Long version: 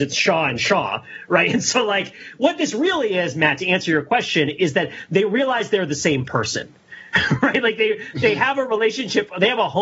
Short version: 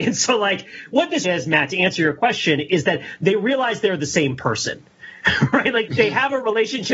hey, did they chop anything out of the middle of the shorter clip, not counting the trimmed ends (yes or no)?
yes